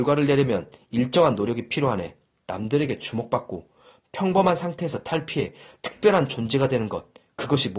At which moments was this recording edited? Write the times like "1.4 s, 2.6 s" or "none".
2.4 s